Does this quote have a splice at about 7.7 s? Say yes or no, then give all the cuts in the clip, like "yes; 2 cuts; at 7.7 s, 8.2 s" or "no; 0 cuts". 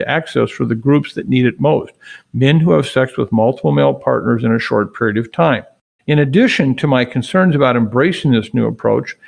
no; 1 cut; at 6.0 s